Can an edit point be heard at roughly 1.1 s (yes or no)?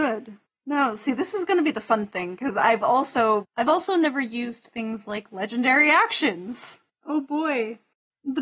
no